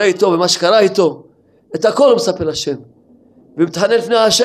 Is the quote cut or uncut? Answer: uncut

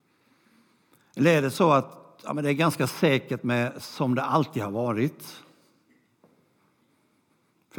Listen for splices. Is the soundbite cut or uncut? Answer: uncut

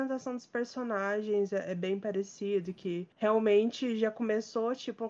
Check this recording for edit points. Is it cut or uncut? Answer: uncut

